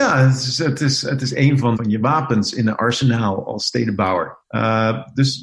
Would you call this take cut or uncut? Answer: cut